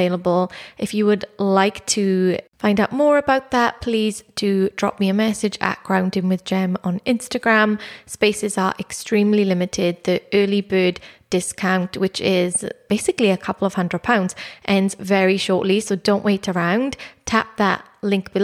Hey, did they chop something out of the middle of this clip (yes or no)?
no